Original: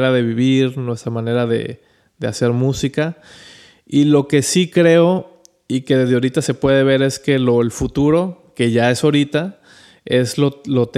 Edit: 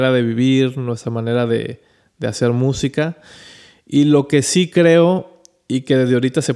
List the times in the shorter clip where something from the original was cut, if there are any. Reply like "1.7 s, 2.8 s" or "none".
none